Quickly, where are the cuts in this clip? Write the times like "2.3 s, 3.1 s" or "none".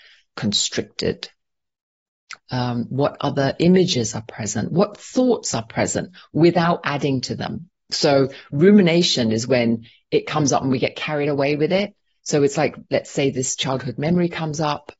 2.4 s